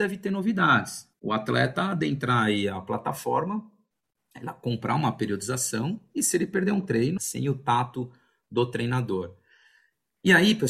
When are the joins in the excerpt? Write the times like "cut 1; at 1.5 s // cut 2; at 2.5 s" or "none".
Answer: cut 1; at 1.1 s // cut 2; at 7.2 s